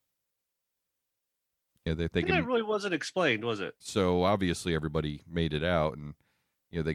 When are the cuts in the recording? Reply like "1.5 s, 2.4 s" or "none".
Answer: 3.8 s

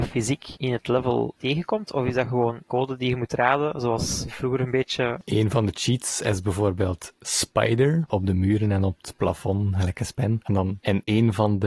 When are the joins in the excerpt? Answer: 8.1 s

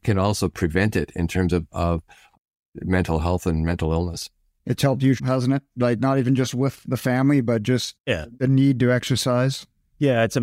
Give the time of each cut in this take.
5.2 s

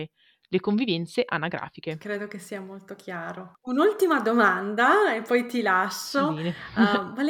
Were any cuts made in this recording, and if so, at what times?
none

